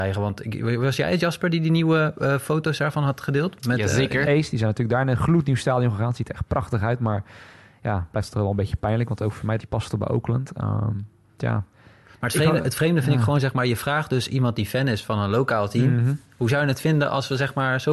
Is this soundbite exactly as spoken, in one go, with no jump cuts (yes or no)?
no